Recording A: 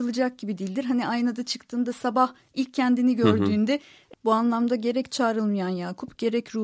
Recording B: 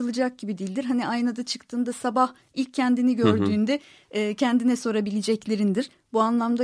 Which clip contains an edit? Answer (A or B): A